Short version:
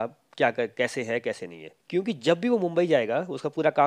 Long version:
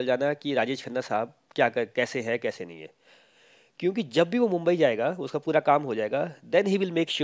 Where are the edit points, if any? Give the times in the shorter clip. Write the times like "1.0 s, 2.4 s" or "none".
1.8 s